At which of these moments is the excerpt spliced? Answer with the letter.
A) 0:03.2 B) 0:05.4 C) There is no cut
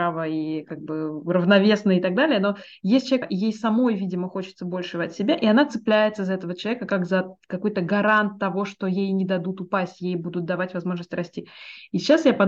A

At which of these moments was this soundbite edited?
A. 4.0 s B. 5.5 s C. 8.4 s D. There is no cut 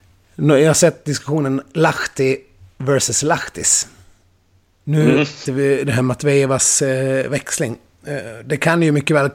B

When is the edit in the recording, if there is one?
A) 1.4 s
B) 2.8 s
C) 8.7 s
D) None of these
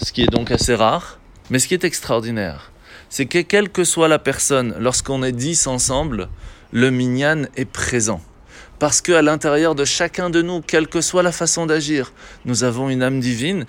A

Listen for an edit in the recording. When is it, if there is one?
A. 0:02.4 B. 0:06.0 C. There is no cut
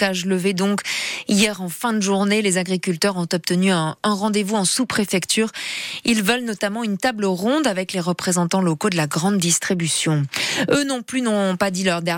C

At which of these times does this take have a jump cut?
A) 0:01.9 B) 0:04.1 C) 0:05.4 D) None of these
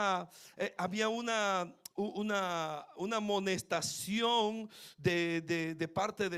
A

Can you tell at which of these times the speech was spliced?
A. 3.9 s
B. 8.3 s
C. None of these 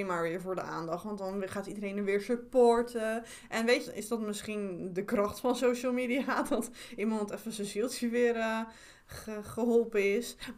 A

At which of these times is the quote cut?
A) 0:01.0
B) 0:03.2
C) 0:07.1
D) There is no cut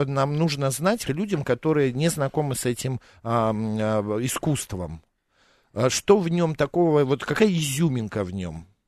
A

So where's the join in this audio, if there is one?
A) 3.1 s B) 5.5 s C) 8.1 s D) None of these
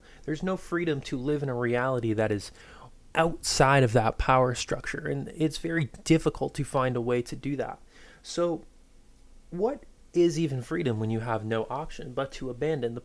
A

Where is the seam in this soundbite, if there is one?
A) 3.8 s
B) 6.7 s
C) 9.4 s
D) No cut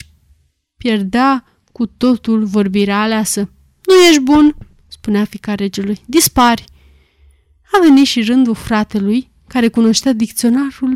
D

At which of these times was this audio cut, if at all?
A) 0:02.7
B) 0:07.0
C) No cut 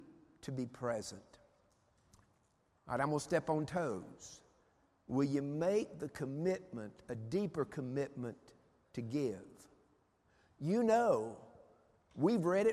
A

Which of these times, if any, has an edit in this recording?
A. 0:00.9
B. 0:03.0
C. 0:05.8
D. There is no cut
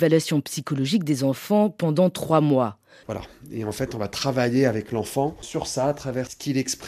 B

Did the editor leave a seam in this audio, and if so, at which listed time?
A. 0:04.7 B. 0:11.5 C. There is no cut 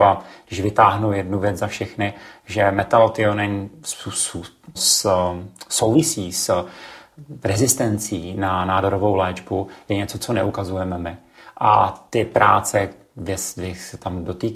A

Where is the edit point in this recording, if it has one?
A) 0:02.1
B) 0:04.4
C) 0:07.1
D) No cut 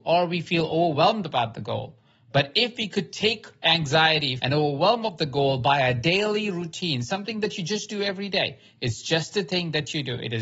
B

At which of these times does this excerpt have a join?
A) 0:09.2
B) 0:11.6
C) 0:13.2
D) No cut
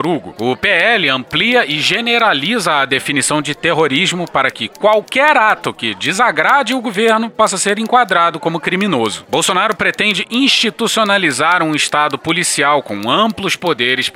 A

